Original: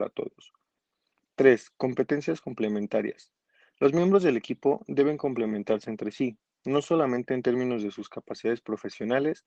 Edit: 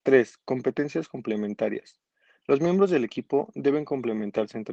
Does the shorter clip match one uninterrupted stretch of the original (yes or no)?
yes